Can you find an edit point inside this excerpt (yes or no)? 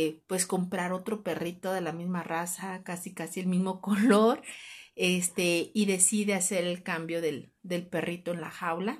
no